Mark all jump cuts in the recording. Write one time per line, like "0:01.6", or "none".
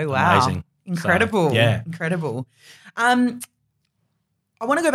none

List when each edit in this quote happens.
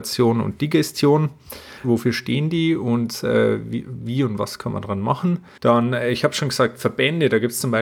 0:01.8
0:05.6

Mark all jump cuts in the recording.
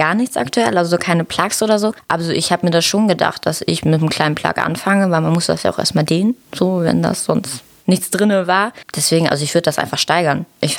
none

